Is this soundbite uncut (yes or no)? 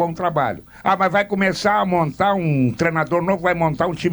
yes